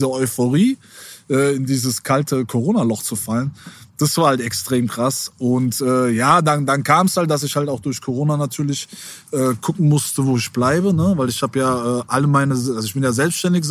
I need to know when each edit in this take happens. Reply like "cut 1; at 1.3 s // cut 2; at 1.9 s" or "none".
none